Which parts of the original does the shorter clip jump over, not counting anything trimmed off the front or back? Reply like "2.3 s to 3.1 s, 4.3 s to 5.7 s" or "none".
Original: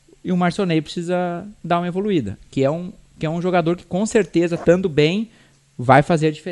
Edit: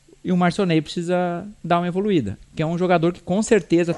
2.4 s to 3.1 s

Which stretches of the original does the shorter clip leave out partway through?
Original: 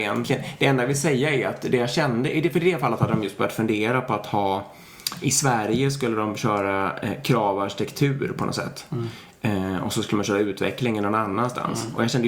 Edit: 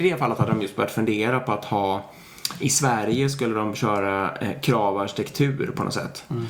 none

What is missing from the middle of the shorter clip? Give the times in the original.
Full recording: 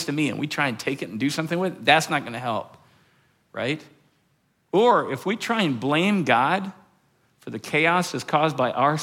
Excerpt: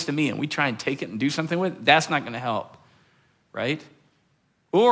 none

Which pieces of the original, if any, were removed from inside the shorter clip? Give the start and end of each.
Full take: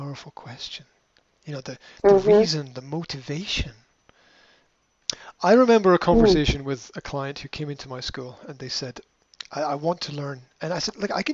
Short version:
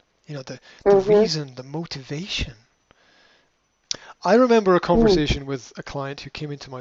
none

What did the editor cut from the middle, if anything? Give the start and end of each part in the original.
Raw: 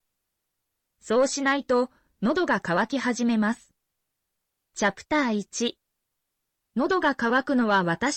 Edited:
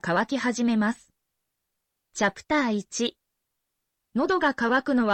none

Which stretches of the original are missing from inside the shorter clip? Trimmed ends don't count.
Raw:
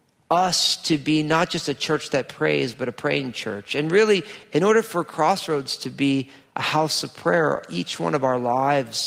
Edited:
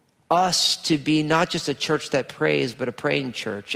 none

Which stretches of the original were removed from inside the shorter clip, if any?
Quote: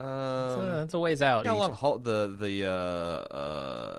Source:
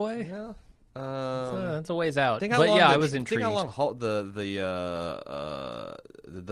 2.4 s to 3.4 s

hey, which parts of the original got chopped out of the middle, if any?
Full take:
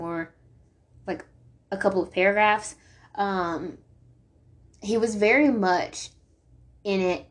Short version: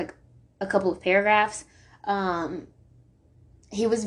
none

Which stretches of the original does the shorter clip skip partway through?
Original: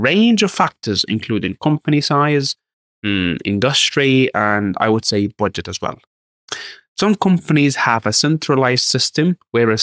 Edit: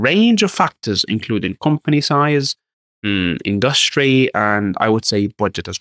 none

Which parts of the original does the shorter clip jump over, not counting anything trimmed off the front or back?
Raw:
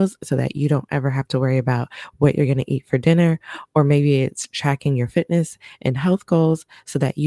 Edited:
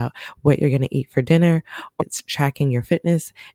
3.8 s to 4.2 s

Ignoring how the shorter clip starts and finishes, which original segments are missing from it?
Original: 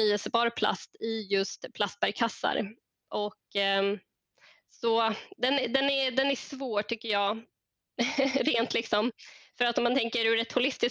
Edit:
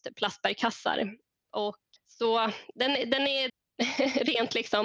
3.5 s to 4.6 s, 6.1 s to 7.7 s

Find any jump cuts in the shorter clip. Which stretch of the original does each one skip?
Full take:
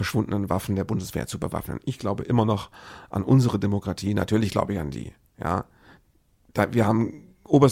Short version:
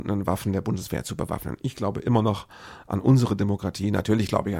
none

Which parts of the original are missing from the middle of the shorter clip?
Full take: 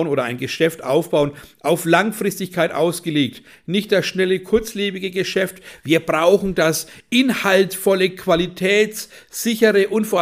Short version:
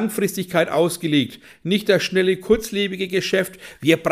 none

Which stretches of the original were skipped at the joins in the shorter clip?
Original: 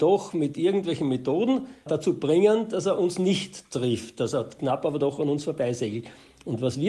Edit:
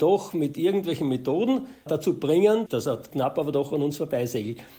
2.7 s to 4.1 s

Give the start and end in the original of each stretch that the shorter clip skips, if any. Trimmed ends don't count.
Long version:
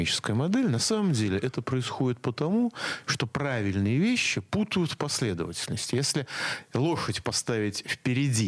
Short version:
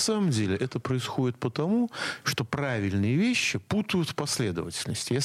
none

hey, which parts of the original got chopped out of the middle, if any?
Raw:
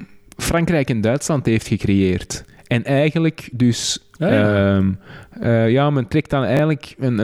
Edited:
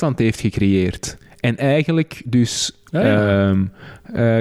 none

